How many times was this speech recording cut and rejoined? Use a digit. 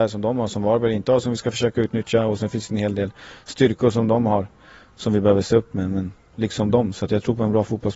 1